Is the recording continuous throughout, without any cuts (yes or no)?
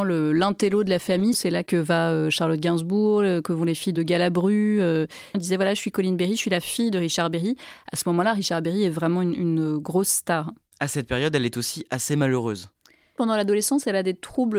no